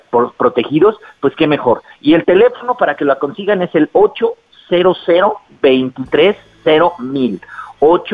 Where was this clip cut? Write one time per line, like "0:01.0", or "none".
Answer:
none